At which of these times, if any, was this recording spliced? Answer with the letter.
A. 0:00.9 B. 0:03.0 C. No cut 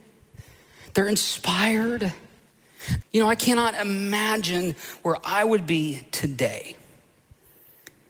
B